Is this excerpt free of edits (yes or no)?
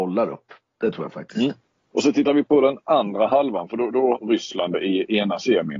no